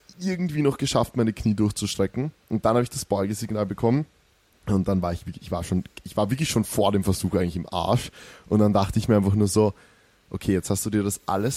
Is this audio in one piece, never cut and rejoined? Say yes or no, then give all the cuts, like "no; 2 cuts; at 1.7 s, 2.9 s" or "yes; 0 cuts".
yes; 0 cuts